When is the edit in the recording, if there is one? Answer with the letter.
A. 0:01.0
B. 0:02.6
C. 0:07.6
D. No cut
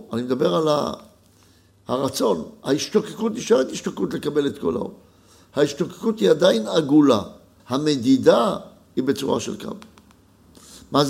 C